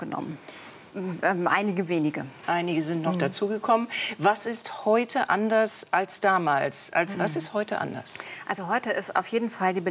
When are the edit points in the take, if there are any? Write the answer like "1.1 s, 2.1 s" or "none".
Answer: 0.9 s, 7.1 s